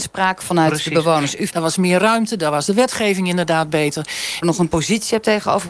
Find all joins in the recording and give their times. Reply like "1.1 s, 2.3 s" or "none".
1.5 s, 4.4 s